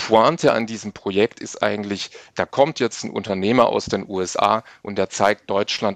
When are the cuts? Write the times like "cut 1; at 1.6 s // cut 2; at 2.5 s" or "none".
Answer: none